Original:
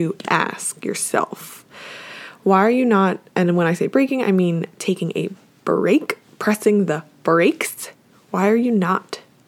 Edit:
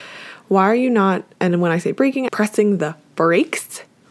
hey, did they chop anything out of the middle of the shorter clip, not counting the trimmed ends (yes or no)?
yes